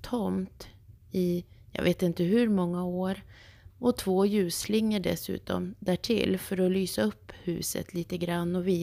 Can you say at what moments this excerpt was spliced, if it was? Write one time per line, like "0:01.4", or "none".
0:03.7

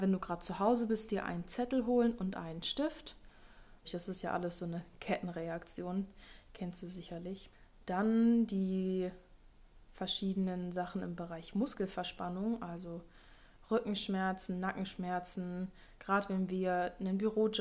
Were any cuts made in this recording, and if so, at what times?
0:03.8

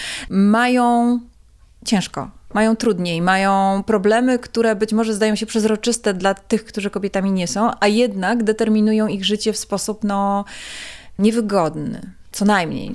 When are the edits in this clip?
none

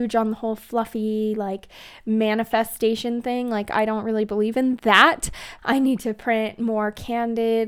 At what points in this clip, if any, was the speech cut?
0:05.6

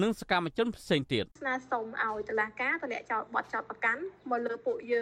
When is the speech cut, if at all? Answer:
0:01.3

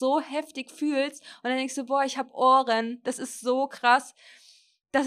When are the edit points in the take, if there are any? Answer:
none

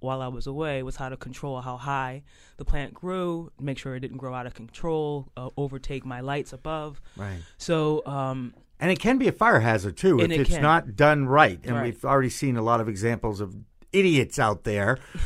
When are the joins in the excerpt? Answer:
none

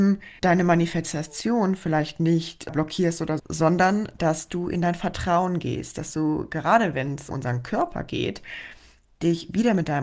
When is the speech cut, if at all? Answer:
0:03.4
0:07.3

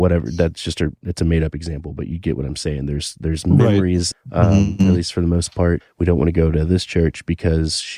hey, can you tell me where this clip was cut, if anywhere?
0:04.1
0:05.8

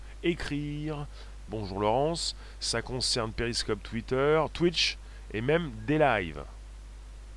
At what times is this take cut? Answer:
0:01.5

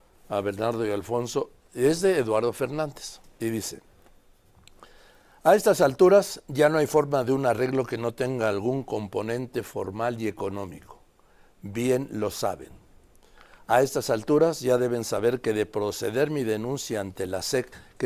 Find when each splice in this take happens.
none

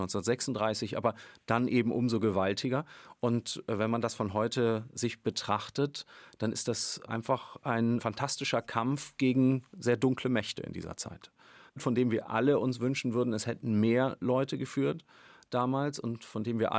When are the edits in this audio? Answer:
none

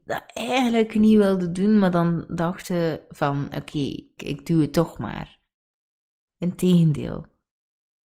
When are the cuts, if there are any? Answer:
0:04.2
0:06.2

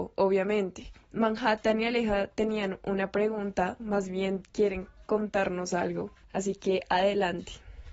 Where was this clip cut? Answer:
0:03.8

